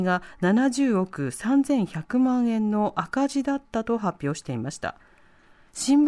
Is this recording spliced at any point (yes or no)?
no